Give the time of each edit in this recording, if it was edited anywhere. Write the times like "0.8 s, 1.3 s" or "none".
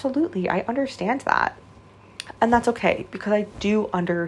2.4 s